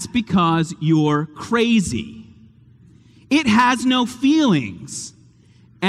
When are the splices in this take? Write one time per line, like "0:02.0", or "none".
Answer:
none